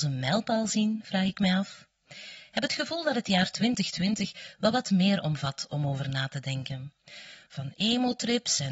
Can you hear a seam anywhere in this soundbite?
yes; 1 cut; at 7.5 s

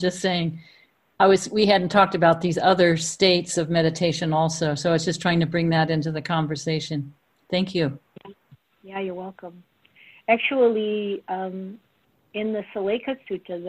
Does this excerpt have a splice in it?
no; 0 cuts

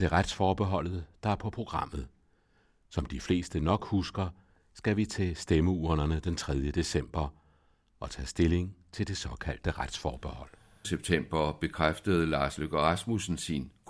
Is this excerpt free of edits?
no; 1 cut; at 10.8 s

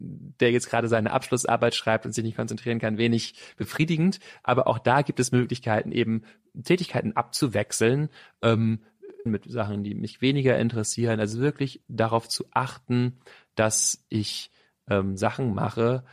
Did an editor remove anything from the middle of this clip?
yes; 1 cut; at 9.3 s

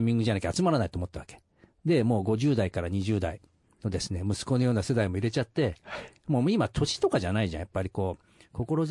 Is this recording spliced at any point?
no; 0 cuts

